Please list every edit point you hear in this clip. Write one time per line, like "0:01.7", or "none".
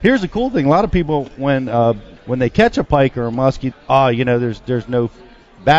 0:02.2
0:03.7